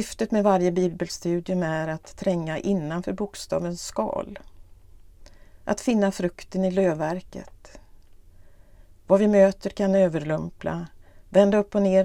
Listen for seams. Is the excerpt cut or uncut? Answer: uncut